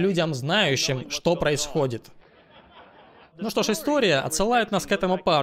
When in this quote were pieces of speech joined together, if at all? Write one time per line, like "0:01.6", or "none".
0:03.3